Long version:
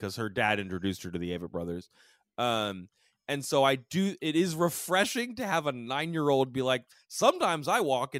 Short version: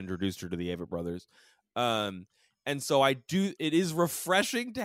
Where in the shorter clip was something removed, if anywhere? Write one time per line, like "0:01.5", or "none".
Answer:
none